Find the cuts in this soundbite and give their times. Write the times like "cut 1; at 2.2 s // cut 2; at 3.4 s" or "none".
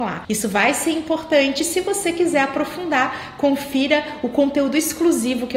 none